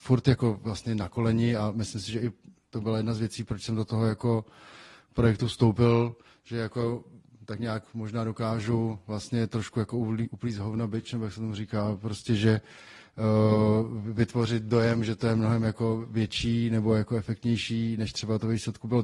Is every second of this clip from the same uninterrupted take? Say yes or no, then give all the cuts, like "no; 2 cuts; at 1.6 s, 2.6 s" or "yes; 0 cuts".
yes; 0 cuts